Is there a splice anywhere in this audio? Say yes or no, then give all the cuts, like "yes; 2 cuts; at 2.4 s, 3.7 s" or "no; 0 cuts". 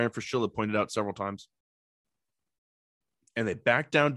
no; 0 cuts